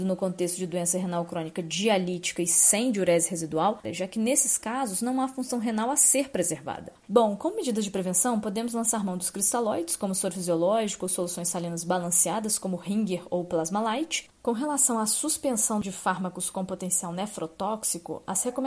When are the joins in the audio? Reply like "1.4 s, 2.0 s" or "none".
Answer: 3.8 s, 14.3 s